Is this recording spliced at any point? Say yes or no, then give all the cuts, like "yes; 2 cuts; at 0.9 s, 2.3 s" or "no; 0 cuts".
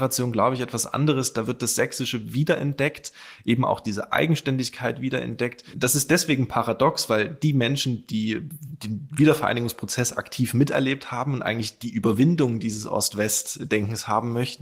no; 0 cuts